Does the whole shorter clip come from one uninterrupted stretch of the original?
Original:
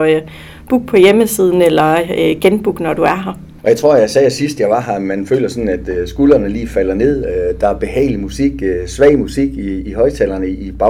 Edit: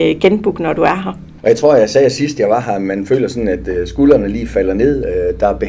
yes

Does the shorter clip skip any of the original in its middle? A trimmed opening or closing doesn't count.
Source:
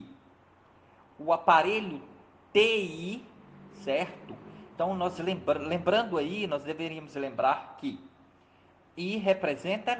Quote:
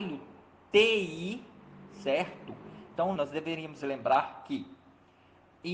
yes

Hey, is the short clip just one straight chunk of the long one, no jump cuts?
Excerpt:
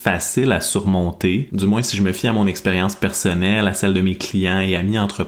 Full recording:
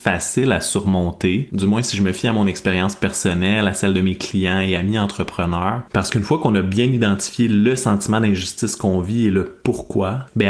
yes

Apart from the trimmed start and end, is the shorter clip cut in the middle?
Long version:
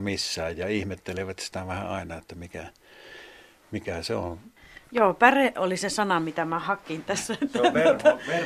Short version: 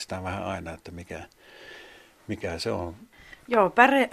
no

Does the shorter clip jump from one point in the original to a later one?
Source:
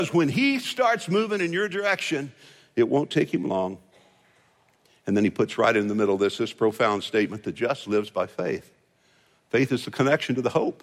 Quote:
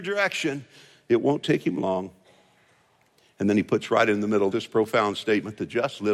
yes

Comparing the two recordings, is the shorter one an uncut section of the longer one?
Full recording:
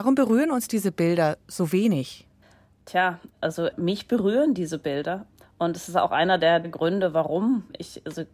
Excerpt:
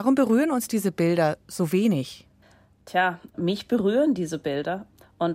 no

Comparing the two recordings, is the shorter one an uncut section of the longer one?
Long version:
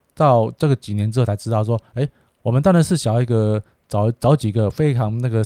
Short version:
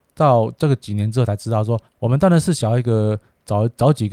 no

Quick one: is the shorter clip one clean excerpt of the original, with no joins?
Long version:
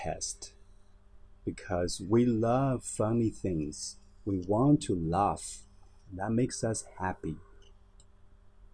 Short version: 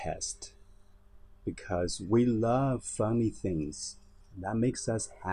no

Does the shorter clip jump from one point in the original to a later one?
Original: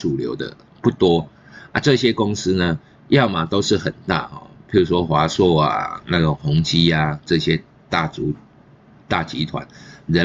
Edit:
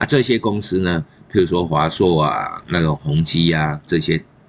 yes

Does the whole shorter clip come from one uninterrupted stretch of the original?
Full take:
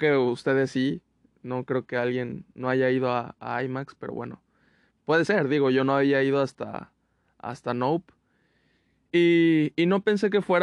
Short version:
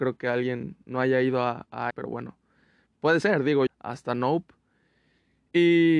no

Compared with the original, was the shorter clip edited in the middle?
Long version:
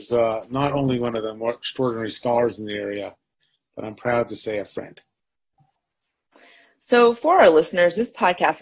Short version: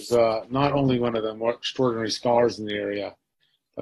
no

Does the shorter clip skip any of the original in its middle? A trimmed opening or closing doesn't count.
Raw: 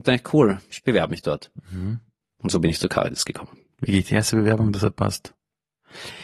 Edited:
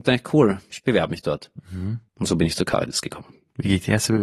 yes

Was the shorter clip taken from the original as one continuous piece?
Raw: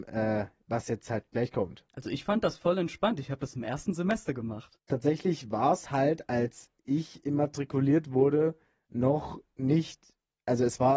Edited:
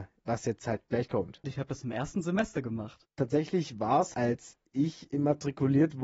no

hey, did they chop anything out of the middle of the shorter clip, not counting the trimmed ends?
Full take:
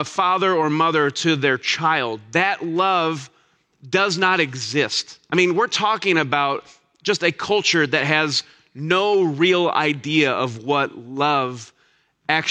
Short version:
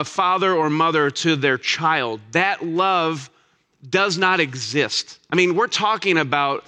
no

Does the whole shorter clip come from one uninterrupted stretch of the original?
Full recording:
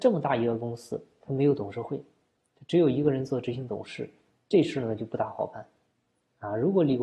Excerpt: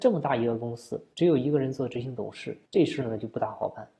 no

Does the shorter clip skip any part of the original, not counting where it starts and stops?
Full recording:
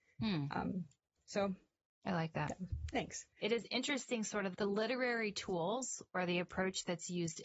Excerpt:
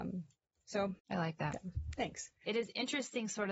yes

